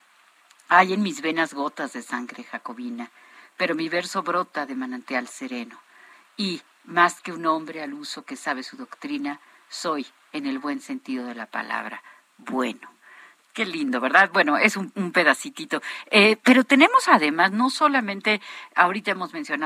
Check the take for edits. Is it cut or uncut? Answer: uncut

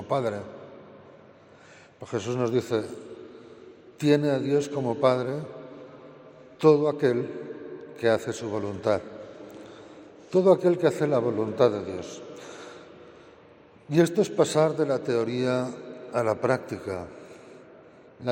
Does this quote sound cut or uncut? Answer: uncut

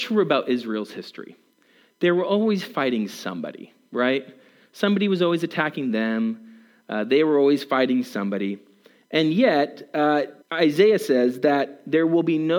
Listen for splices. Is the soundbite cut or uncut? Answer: cut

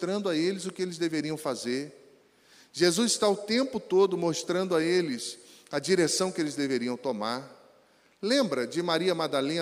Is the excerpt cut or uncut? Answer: uncut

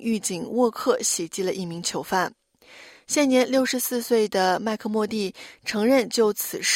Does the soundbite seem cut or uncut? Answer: uncut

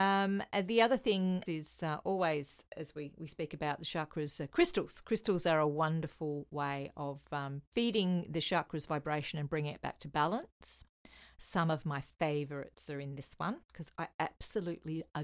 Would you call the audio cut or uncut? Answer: cut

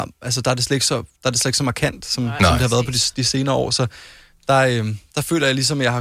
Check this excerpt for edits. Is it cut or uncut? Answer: uncut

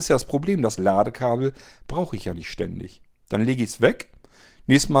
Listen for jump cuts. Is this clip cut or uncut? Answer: uncut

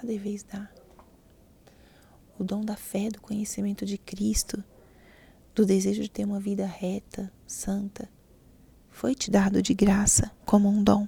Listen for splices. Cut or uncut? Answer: uncut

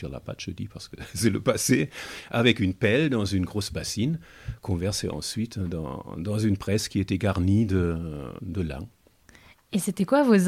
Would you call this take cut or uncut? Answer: cut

